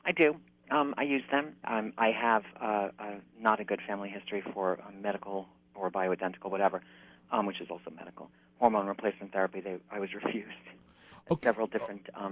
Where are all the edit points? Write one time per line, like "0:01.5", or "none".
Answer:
0:01.6